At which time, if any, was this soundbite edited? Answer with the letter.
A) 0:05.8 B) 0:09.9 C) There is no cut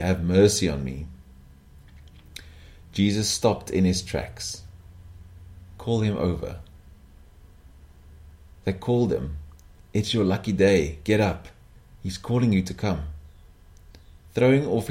C